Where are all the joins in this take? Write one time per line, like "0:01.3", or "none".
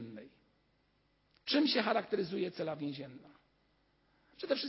none